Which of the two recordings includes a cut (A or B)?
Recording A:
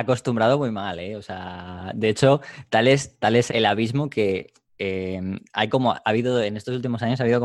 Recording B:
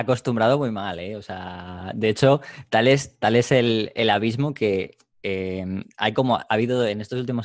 A